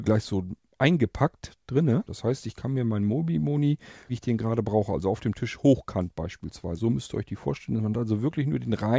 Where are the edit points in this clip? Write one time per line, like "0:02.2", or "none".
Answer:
0:02.1
0:04.1
0:06.8